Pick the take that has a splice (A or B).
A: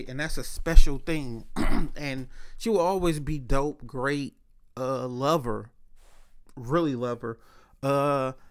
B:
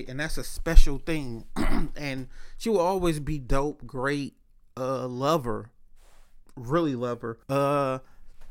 B